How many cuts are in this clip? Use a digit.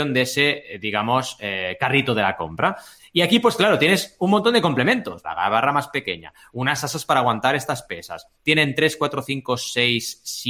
3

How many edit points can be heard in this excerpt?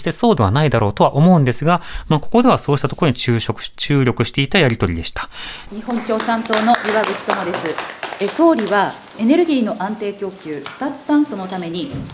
1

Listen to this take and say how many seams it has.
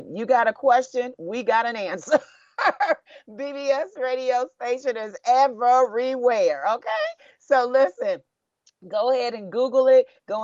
0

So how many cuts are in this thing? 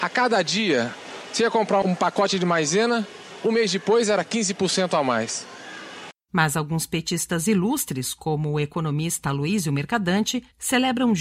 2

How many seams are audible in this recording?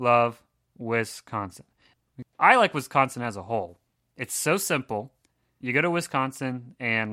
1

